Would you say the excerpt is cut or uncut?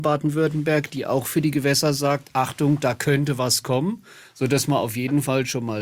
uncut